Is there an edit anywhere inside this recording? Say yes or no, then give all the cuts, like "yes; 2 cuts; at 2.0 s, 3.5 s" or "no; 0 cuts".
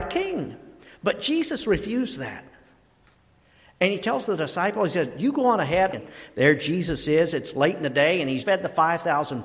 yes; 2 cuts; at 5.9 s, 8.4 s